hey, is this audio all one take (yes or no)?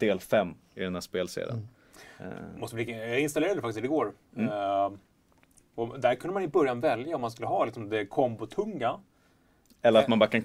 yes